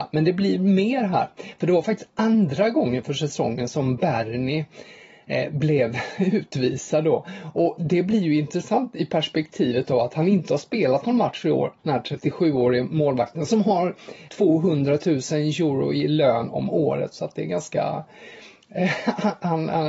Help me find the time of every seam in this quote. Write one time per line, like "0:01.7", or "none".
0:11.8
0:14.3